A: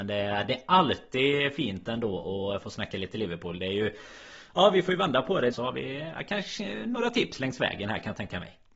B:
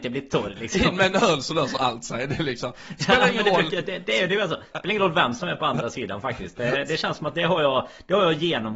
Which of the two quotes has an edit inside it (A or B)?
A